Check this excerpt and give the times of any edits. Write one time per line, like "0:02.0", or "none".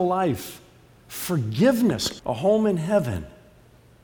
0:02.2

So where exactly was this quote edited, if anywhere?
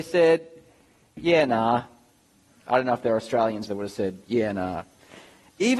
0:03.7

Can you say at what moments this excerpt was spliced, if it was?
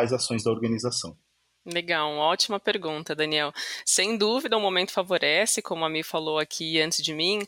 none

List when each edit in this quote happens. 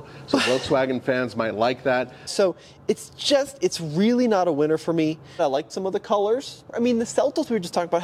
0:02.3
0:05.4
0:06.7

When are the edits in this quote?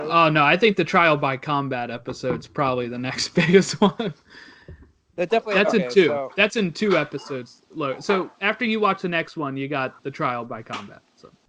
0:10.0

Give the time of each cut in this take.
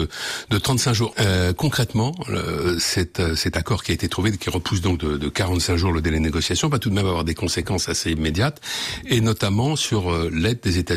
0:01.1

